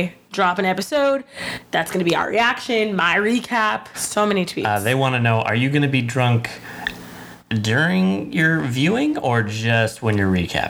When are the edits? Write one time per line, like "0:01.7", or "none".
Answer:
0:03.9